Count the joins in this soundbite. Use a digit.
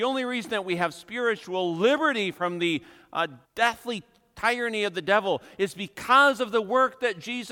1